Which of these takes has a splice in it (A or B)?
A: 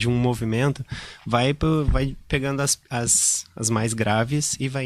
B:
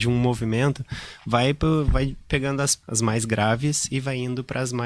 B